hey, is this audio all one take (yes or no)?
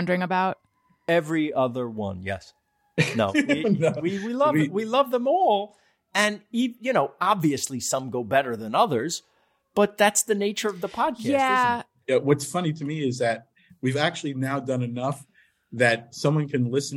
yes